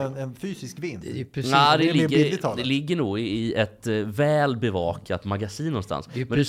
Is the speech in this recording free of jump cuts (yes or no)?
yes